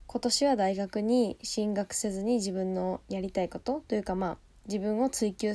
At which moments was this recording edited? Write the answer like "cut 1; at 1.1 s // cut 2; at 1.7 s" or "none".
none